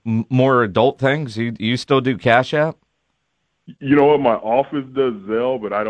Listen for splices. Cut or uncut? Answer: uncut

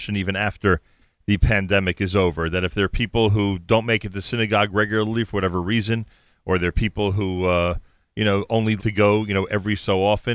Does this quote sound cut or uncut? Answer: cut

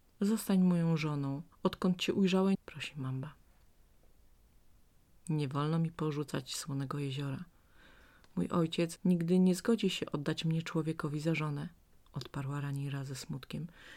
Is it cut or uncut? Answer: cut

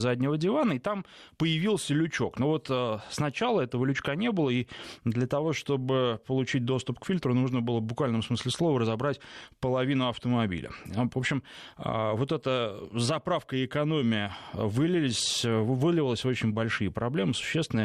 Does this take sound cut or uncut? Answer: cut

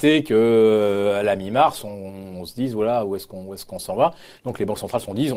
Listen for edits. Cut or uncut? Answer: uncut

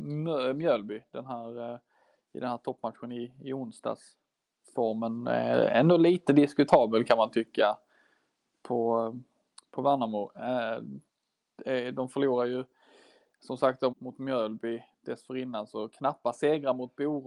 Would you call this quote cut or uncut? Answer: cut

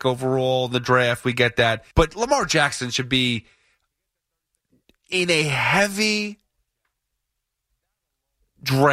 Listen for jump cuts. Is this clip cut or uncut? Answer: cut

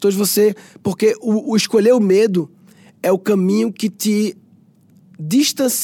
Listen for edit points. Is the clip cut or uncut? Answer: uncut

